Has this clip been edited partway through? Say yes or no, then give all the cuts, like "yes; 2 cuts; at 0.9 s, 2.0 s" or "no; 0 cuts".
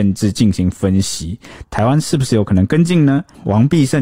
yes; 1 cut; at 1.6 s